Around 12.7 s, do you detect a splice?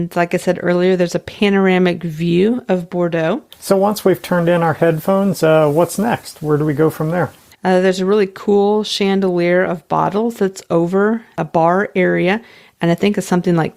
no; 2 cuts; at 3.5 s, 7.5 s

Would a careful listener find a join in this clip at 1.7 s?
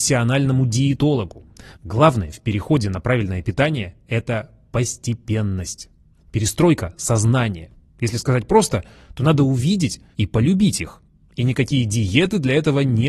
yes; 2 cuts; at 1.7 s, 10.1 s

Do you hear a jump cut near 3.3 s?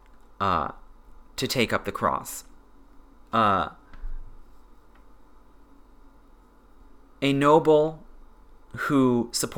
yes; 1 cut; at 3.3 s

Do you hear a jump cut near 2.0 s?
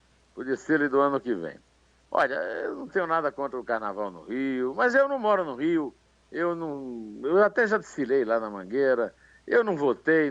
no; 0 cuts

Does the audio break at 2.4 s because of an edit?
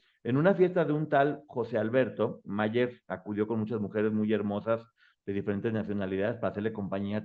yes; 1 cut; at 2.4 s

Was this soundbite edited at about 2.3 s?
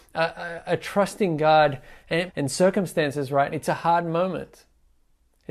yes; 2 cuts; at 2.3 s, 3.5 s

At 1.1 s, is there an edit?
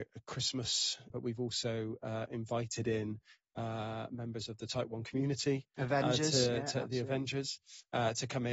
yes; 1 cut; at 1.1 s

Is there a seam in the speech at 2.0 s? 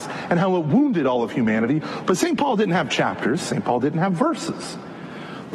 yes; 1 cut; at 2.0 s

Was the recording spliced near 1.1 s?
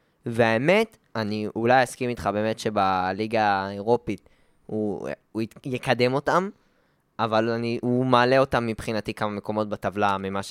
yes; 1 cut; at 1.1 s

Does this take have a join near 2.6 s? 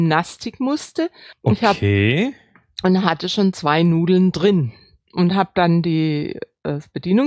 no; 1 cut; at 1.3 s

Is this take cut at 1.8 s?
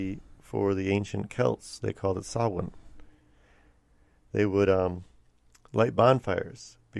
no; 0 cuts

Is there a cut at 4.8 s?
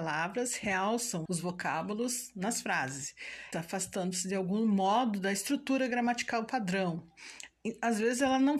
no; 2 cuts; at 1.3 s, 3.5 s

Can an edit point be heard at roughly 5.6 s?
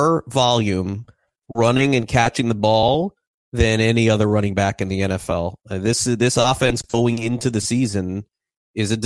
no; 0 cuts

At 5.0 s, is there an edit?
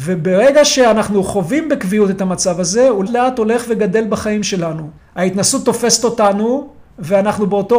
yes; 2 cuts; at 3.1 s, 5.0 s

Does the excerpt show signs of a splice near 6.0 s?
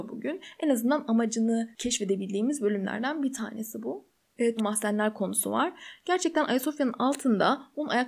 no; 1 cut; at 4.6 s

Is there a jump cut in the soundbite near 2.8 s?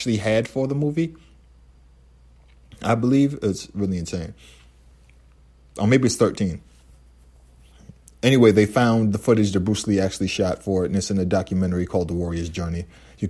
no; 0 cuts

